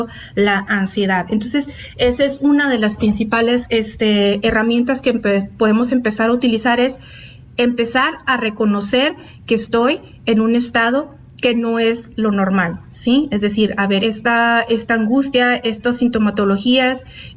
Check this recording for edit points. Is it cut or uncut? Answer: cut